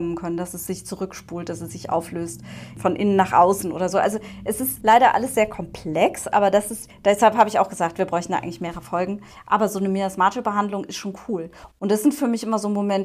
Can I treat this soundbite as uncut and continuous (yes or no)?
no